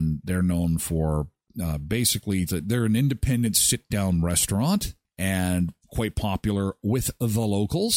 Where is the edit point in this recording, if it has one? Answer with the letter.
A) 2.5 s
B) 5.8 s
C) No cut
A